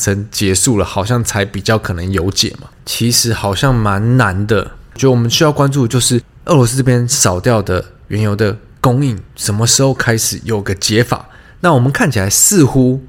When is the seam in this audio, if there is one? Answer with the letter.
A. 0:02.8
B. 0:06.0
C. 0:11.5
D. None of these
A